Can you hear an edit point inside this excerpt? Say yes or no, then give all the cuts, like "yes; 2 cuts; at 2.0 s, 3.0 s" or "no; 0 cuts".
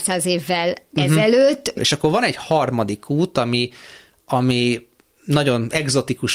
yes; 1 cut; at 1.8 s